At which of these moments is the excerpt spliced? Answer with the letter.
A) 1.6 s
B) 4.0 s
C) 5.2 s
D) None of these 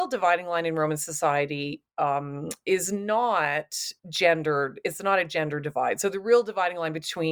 B